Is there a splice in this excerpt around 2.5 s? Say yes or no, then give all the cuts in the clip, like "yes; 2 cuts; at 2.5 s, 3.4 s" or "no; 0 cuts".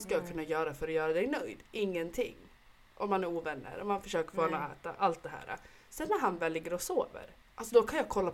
no; 0 cuts